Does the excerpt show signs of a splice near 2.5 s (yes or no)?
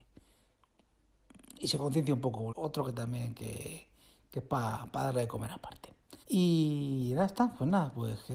yes